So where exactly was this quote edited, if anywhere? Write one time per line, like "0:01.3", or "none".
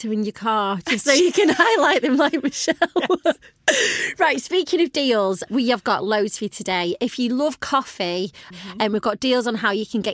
0:05.5
0:08.5